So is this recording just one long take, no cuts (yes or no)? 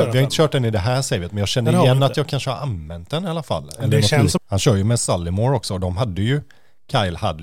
no